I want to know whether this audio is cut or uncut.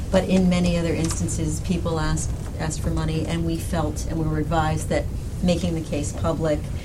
uncut